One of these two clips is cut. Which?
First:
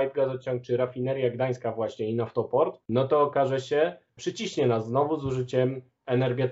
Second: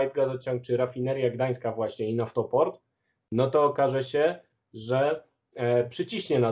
first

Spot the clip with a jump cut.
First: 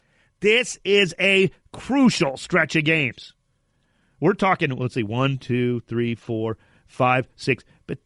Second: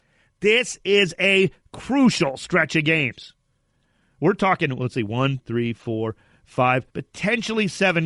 second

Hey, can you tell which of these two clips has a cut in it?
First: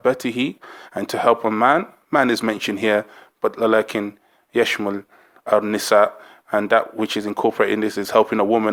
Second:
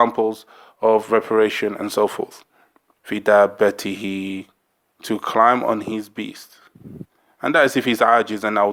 second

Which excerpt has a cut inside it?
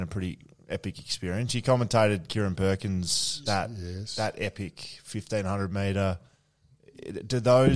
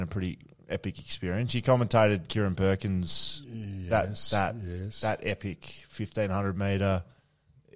first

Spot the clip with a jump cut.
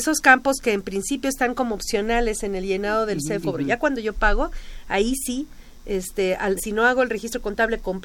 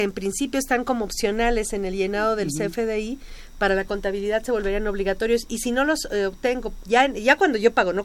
first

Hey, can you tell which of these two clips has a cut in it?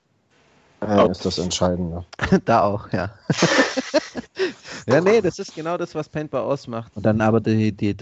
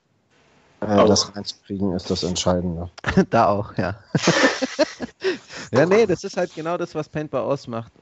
first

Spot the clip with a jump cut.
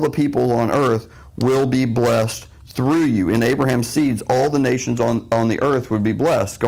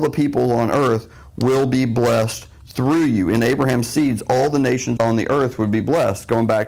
second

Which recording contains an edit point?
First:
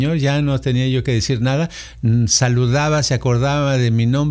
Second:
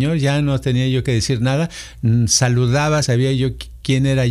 second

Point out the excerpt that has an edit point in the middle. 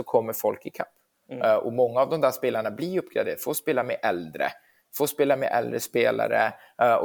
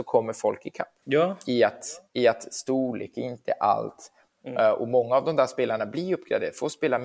second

